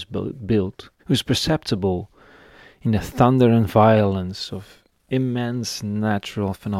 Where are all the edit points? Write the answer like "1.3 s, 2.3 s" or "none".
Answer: 1.0 s